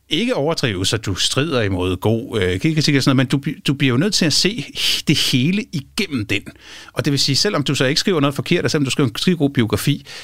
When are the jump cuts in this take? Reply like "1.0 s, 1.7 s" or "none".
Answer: none